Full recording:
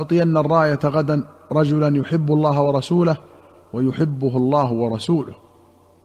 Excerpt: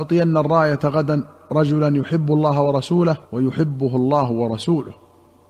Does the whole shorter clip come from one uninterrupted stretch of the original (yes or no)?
no